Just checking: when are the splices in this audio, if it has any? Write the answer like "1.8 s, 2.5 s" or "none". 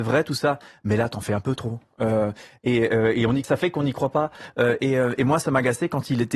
3.4 s

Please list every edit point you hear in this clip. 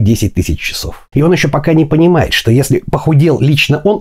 1.1 s

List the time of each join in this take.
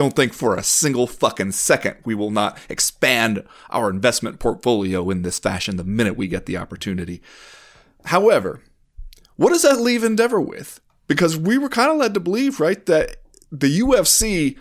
none

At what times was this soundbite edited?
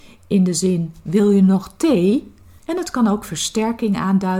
2.6 s

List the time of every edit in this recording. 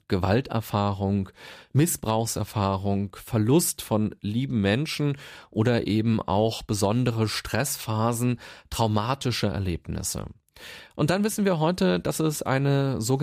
none

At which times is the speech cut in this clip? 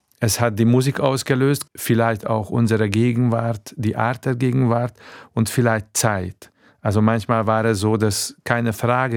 1.7 s

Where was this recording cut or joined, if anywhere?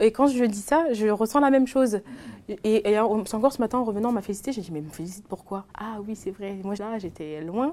5.7 s, 6.8 s

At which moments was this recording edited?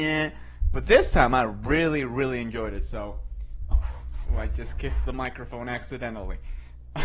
3.7 s

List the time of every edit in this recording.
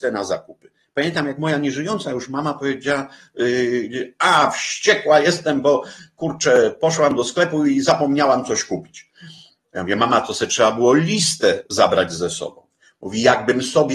none

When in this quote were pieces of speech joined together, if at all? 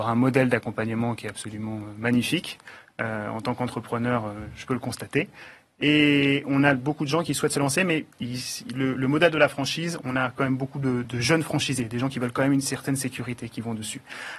8.1 s, 11.0 s

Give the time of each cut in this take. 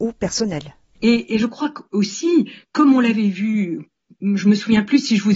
0.9 s

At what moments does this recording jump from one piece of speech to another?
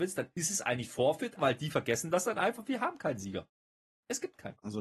1.4 s

